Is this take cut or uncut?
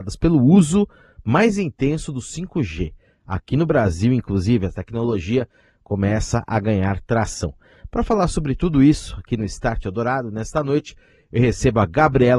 uncut